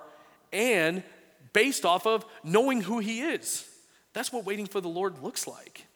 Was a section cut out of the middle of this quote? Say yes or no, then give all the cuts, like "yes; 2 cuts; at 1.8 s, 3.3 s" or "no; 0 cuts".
no; 0 cuts